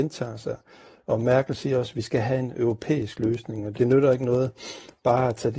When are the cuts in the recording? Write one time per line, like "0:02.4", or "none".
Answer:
0:03.7